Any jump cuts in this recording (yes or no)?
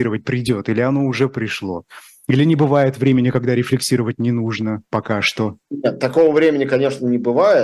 no